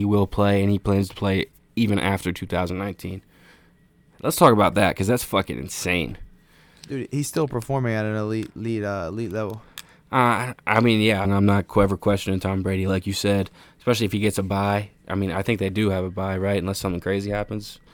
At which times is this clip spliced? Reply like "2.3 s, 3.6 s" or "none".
11.2 s